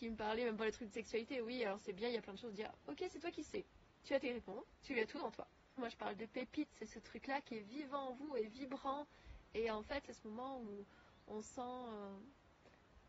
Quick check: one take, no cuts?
no; 2 cuts; at 5.8 s, 10.0 s

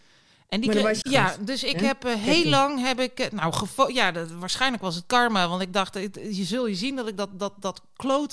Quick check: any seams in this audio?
yes; 1 cut; at 1.0 s

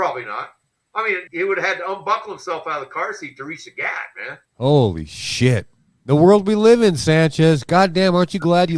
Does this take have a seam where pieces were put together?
yes; 2 cuts; at 1.3 s, 4.5 s

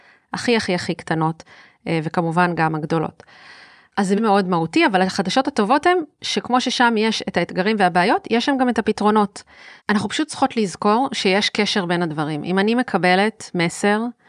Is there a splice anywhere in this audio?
yes; 2 cuts; at 4.2 s, 9.8 s

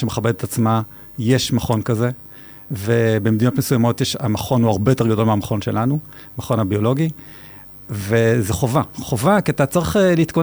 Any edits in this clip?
no; 0 cuts

